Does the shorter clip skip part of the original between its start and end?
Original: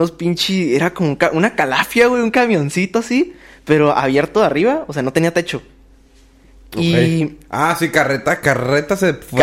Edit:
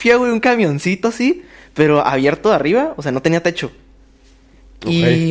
no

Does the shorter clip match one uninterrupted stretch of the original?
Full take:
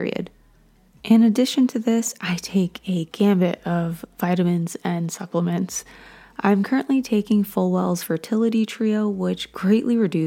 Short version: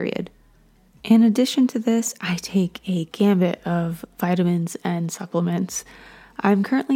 yes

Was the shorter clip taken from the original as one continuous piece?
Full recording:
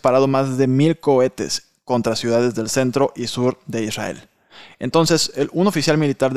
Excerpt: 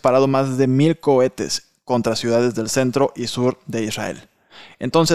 yes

